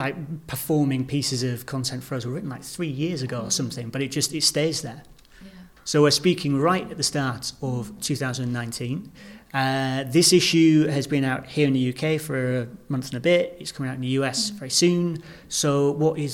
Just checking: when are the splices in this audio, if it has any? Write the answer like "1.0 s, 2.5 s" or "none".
none